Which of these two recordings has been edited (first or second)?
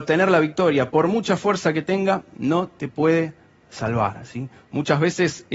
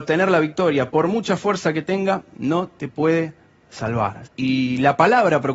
second